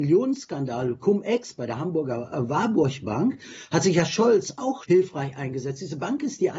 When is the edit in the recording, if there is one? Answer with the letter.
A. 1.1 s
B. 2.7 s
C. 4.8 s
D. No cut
C